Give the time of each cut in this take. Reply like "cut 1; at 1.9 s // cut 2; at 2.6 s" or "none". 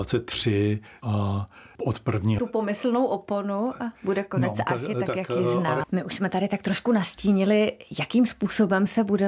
cut 1; at 2.4 s // cut 2; at 5.8 s